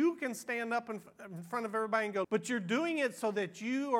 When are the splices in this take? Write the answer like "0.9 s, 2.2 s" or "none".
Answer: 2.2 s